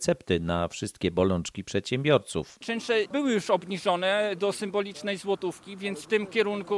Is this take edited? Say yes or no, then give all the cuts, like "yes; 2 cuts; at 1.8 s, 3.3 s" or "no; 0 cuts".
no; 0 cuts